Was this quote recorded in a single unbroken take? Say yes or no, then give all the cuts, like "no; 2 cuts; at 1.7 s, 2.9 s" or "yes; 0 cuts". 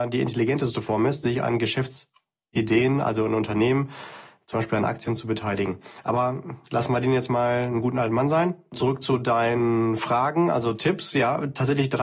yes; 0 cuts